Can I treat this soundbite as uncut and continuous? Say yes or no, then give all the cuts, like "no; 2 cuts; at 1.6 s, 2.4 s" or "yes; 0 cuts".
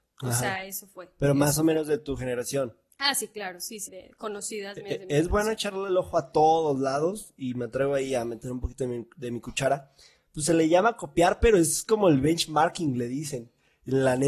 no; 1 cut; at 3.9 s